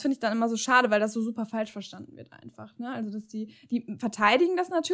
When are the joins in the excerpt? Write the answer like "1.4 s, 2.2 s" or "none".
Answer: none